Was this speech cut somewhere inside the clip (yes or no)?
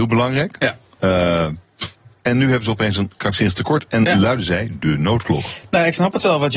no